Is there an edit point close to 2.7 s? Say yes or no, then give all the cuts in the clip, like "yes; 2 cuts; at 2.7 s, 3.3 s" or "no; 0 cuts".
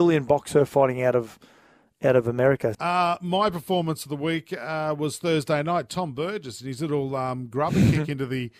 yes; 1 cut; at 2.7 s